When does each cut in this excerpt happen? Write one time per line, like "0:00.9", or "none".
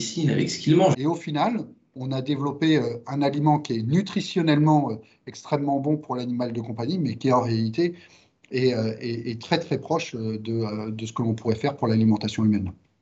0:00.9